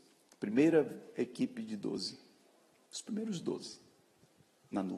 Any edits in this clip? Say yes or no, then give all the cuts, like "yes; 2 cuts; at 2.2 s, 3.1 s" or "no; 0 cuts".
no; 0 cuts